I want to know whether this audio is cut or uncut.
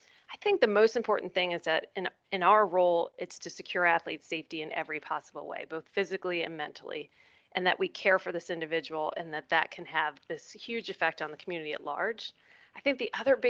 uncut